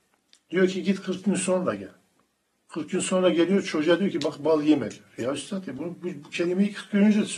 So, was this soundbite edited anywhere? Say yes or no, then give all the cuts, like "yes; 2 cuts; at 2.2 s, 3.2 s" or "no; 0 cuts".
no; 0 cuts